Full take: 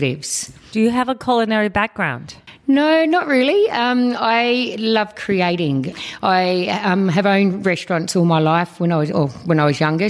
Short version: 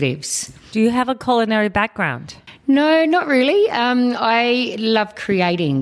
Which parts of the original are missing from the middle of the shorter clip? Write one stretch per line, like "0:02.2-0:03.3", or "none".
none